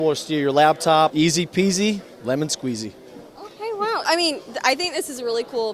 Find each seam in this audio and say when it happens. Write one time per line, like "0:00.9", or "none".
0:01.1
0:04.0